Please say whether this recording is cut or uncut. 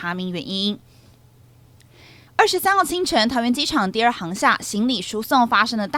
cut